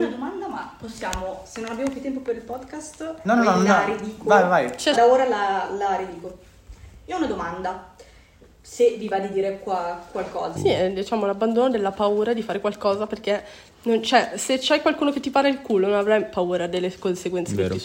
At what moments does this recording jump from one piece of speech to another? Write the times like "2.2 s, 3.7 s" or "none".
4.9 s, 10.6 s